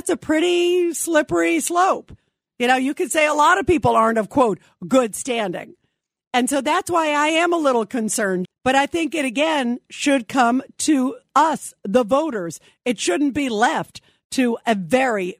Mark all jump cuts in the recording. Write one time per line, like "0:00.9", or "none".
0:08.4